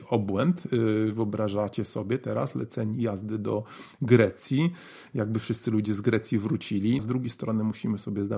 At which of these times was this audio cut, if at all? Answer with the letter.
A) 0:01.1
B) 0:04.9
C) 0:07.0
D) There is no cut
C